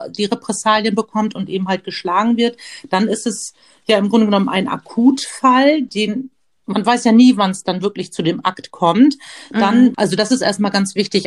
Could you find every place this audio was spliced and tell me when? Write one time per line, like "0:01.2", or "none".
0:09.9